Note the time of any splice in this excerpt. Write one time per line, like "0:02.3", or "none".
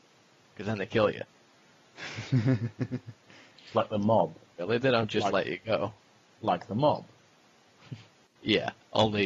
0:04.6